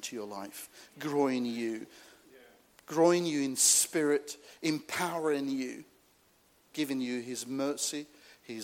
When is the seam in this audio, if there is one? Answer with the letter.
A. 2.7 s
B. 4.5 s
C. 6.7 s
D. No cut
C